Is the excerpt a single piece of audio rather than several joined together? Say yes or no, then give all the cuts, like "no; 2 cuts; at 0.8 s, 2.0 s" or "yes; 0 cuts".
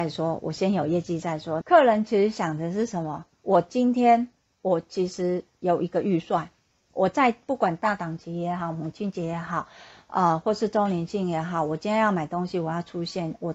no; 1 cut; at 1.6 s